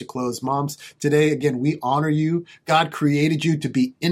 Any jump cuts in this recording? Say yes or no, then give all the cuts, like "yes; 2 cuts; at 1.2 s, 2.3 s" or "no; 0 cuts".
no; 0 cuts